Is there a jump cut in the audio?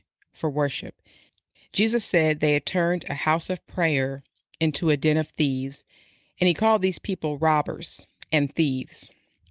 yes; 1 cut; at 1.5 s

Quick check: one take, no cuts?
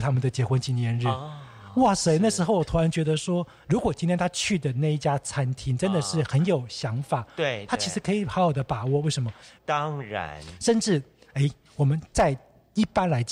no; 1 cut; at 9.5 s

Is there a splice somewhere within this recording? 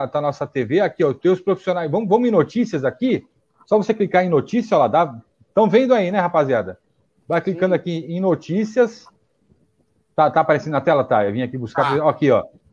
no; 0 cuts

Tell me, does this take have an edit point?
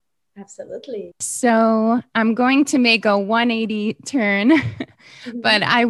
yes; 1 cut; at 1.1 s

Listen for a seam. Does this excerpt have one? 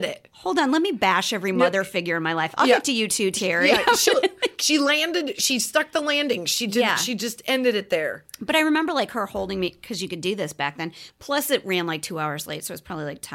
yes; 1 cut; at 11.1 s

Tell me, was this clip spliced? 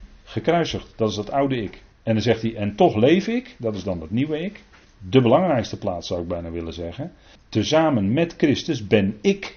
yes; 3 cuts; at 1.9 s, 4.8 s, 7.4 s

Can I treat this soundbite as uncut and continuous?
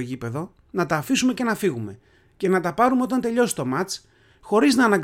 yes; 0 cuts

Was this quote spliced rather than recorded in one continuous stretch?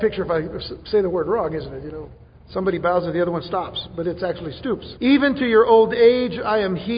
yes; 1 cut; at 5.0 s

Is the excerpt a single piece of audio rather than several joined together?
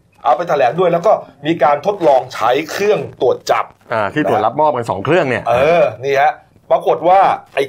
yes; 0 cuts

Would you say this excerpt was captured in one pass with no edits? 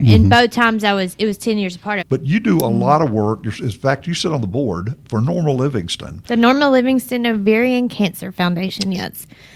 no; 1 cut; at 2.0 s

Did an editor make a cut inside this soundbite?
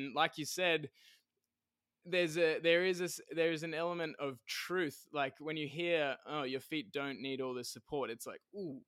no; 0 cuts

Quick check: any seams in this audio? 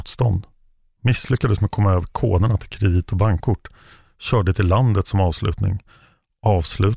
no; 0 cuts

